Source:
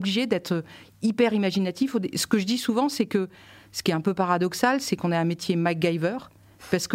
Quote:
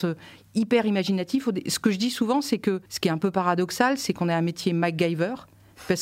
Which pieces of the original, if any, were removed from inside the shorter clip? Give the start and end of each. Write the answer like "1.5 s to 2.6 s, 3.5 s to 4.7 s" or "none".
3.3 s to 3.7 s